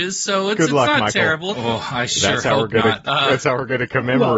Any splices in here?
yes; 1 cut; at 1.5 s

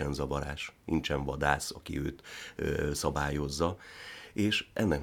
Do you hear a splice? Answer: no; 0 cuts

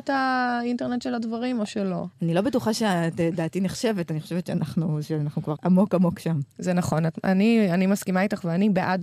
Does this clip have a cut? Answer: yes; 1 cut; at 5.6 s

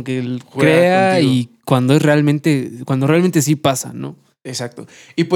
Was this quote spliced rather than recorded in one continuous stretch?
no; 0 cuts

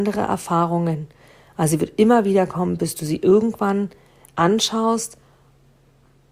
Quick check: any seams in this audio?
no; 0 cuts

